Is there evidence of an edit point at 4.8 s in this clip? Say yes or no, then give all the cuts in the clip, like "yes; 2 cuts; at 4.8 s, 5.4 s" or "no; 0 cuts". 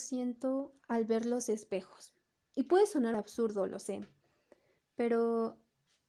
no; 1 cut; at 3.1 s